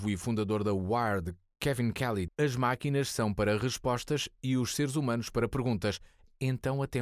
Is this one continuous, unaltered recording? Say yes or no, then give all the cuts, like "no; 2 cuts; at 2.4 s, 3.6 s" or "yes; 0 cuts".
no; 1 cut; at 2.3 s